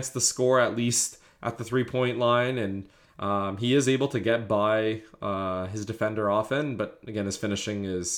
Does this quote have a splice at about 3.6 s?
no; 0 cuts

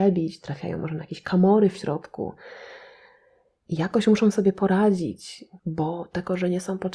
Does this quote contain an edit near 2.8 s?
no; 1 cut; at 5.6 s

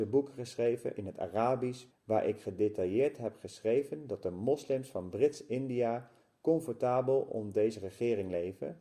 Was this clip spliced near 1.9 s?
yes; 1 cut; at 1.9 s

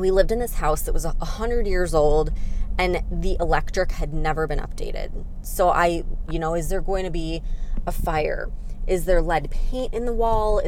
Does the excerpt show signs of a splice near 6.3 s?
yes; 1 cut; at 6.3 s

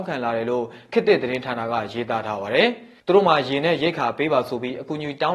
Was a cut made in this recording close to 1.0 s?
no; 1 cut; at 3.0 s

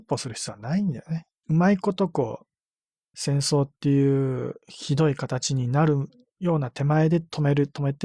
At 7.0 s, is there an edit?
no; 3 cuts; at 1.4 s, 3.1 s, 4.6 s

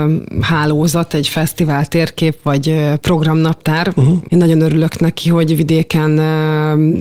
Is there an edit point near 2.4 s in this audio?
no; 1 cut; at 4.3 s

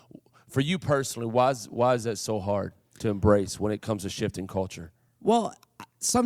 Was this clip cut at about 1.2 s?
no; 0 cuts

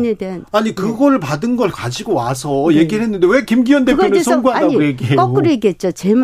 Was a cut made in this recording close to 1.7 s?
yes; 1 cut; at 1.7 s

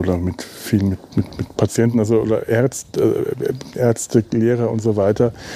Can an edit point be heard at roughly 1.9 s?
no; 0 cuts

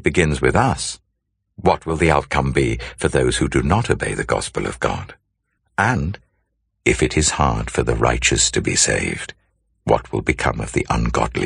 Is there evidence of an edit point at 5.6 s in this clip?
no; 0 cuts

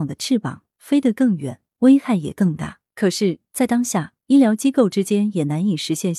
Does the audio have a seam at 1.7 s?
no; 1 cut; at 2.9 s

